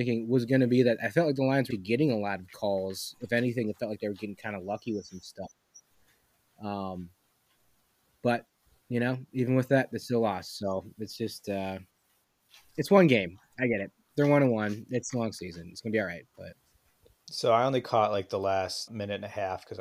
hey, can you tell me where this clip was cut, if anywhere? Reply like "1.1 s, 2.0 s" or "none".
1.7 s, 18.9 s